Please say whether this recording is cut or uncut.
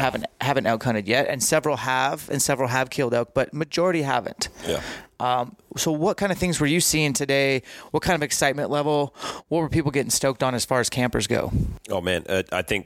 uncut